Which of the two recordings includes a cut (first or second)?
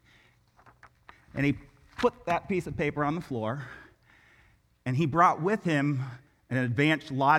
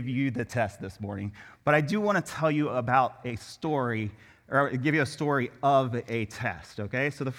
first